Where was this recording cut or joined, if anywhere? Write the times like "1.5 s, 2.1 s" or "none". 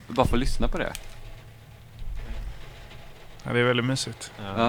none